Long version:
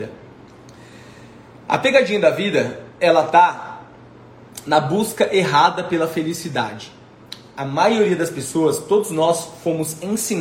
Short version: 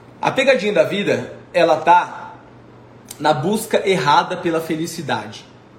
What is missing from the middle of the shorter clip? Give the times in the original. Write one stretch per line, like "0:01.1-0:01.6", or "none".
none